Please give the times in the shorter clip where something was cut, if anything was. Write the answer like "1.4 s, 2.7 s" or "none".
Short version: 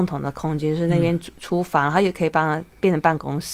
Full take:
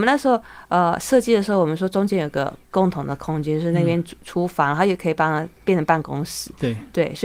none